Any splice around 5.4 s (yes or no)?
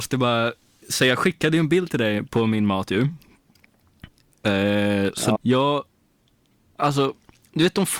yes